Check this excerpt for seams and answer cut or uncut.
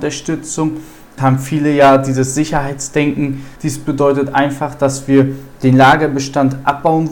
cut